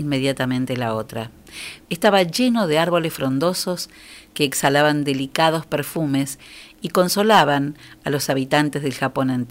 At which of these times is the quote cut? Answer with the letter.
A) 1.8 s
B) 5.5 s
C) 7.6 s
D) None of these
A